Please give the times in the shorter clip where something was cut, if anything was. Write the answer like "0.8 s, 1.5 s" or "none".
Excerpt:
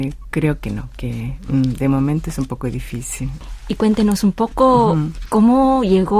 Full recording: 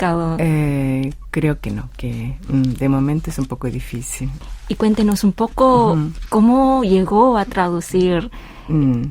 none